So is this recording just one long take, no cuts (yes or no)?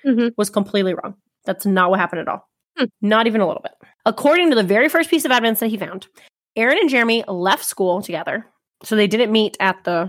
yes